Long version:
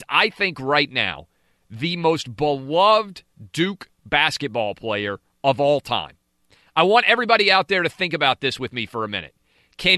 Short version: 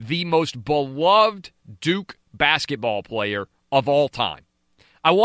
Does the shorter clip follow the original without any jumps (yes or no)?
yes